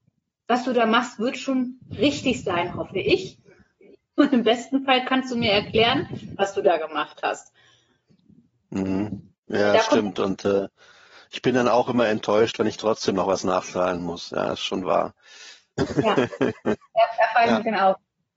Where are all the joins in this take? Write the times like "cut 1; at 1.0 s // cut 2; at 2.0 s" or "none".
none